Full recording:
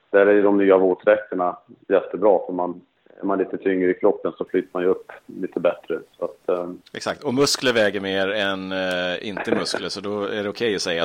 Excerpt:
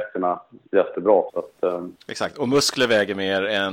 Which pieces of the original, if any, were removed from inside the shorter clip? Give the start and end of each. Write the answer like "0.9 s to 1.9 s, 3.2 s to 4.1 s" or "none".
2.5 s to 6.1 s